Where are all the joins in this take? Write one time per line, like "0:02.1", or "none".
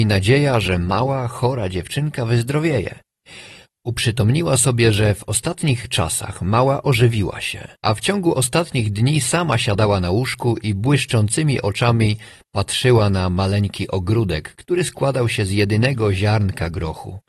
0:07.8